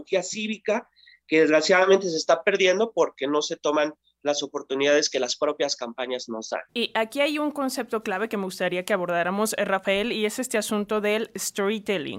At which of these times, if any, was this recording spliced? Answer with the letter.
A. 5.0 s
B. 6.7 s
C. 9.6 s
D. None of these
B